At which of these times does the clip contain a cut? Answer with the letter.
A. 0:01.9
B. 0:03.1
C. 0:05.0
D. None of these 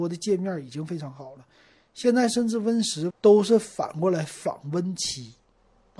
B